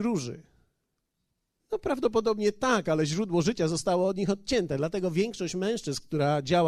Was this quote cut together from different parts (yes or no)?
yes